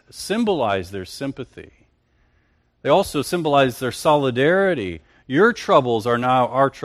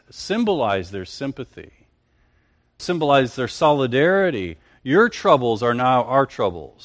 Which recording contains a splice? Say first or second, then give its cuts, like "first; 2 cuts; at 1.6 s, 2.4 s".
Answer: second; 1 cut; at 2.8 s